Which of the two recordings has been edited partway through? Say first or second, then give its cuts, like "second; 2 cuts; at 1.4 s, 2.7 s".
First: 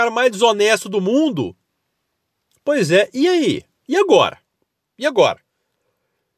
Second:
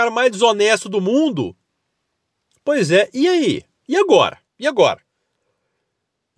second; 1 cut; at 4.5 s